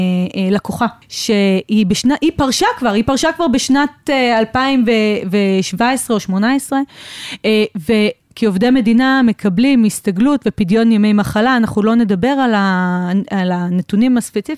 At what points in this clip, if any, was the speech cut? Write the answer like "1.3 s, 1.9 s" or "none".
1.0 s, 8.3 s